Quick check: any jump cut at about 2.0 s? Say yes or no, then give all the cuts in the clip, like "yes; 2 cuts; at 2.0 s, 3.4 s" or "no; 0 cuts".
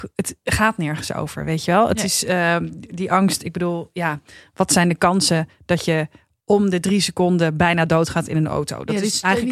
no; 0 cuts